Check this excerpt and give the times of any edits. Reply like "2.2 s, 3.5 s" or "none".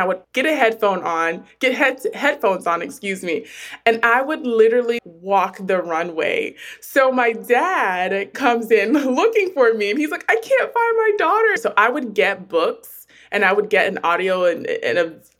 5.0 s, 11.6 s